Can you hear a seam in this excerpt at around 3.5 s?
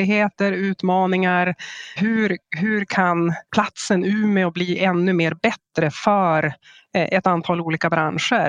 yes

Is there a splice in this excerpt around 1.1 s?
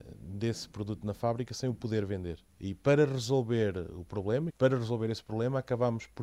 no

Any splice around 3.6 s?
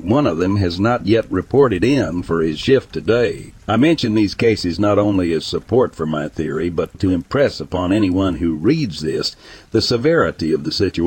yes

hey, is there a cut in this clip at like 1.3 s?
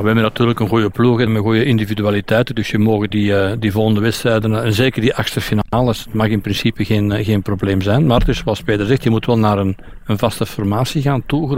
yes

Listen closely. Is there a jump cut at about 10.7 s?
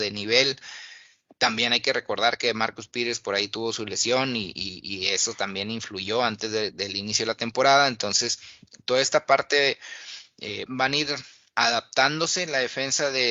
yes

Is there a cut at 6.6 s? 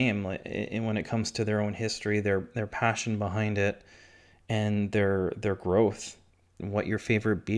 yes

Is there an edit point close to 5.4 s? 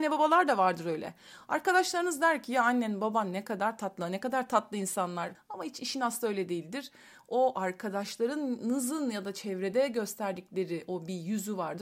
yes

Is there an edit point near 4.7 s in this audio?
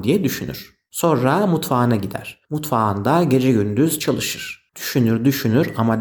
yes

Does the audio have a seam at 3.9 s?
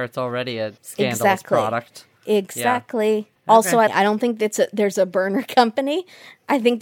yes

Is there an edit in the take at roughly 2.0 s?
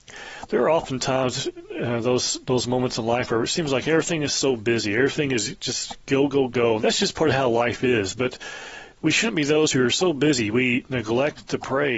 no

